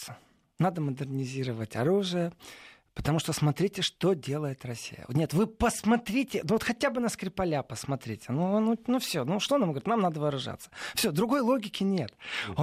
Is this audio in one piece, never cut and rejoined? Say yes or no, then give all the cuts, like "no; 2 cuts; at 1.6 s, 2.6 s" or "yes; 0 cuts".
yes; 0 cuts